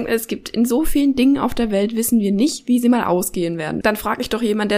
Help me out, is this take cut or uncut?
cut